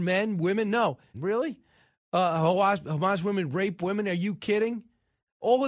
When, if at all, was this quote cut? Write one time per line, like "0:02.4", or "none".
0:01.1